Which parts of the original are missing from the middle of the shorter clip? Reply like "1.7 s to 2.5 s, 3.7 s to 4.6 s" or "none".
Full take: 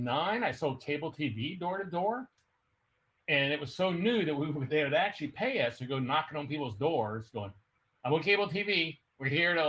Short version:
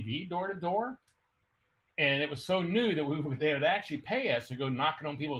none